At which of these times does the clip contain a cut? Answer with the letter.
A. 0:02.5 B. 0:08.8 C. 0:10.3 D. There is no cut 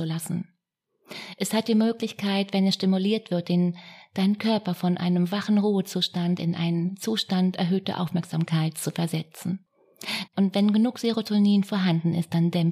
C